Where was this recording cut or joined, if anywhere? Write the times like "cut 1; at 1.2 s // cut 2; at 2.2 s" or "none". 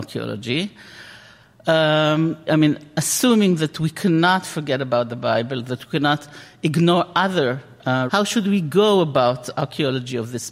cut 1; at 2.5 s // cut 2; at 8.1 s